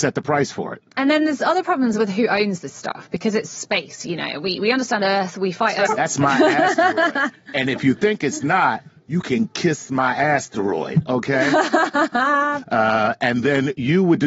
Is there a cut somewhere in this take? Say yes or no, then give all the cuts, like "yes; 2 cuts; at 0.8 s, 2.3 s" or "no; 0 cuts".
yes; 2 cuts; at 5.9 s, 12.6 s